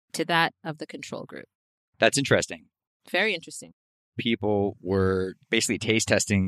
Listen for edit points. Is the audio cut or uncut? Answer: uncut